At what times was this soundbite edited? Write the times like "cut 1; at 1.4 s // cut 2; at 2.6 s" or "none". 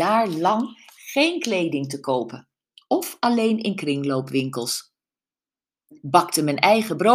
none